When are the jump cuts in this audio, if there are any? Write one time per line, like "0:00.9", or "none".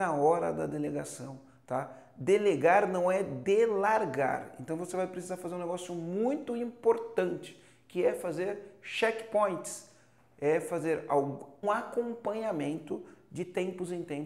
0:11.6

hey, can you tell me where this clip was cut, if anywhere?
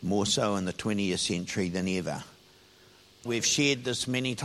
0:03.3

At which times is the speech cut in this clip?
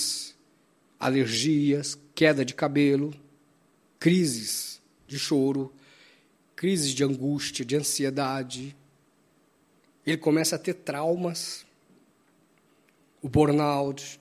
none

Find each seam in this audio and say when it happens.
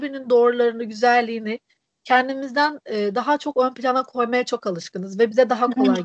none

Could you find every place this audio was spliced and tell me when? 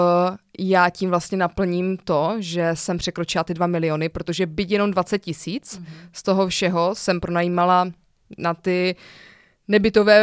none

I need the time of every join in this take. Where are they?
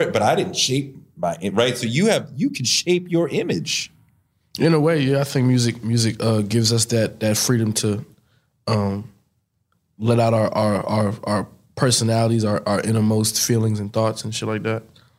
none

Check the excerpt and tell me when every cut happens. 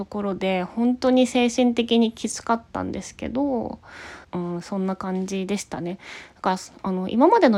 0:04.2

